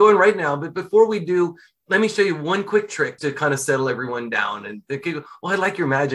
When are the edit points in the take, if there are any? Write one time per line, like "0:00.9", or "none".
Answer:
0:03.2